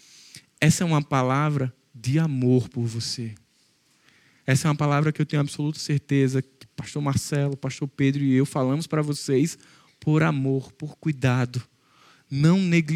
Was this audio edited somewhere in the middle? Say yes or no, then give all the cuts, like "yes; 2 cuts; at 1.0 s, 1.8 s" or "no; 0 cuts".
no; 0 cuts